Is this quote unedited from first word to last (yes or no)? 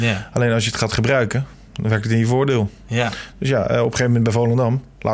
yes